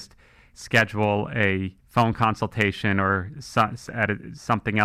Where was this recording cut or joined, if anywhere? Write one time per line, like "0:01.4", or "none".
0:01.8